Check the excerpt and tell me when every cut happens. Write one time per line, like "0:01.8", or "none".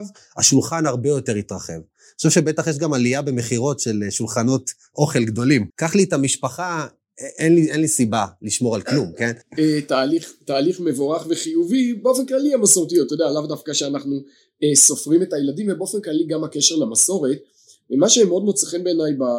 0:05.7
0:09.4